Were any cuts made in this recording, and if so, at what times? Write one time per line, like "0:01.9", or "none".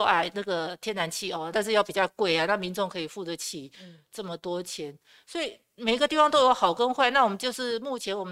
0:01.5